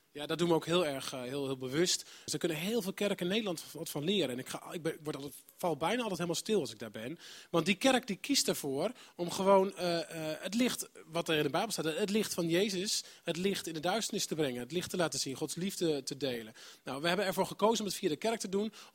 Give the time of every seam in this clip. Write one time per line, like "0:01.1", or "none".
0:02.3